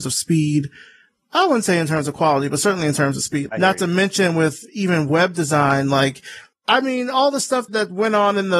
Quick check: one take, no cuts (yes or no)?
no